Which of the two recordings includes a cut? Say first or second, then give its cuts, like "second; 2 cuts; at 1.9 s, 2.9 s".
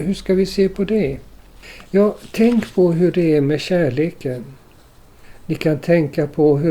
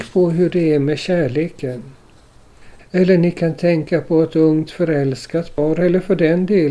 second; 1 cut; at 2.8 s